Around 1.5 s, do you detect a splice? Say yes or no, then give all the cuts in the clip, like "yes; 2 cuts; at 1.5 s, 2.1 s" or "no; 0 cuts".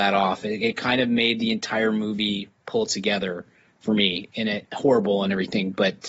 no; 1 cut; at 4.6 s